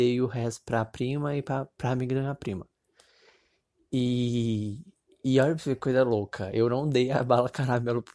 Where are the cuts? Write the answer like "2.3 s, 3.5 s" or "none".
none